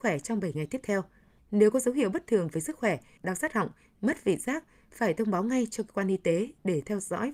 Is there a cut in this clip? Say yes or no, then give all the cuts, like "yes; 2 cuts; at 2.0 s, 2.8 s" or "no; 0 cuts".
yes; 2 cuts; at 1.4 s, 3.2 s